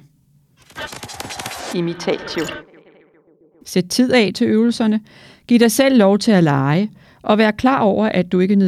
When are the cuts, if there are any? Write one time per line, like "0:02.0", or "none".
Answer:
0:03.6